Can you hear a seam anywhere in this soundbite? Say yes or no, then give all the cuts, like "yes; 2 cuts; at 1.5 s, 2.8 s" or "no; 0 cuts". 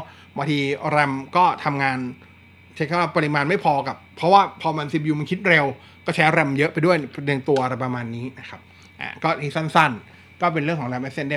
no; 0 cuts